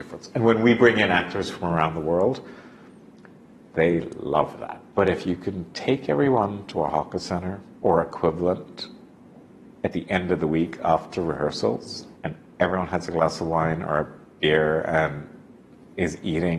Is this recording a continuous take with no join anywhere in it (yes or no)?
no